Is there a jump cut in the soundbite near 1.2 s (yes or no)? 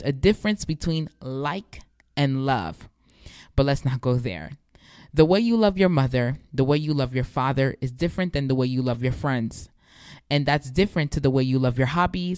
no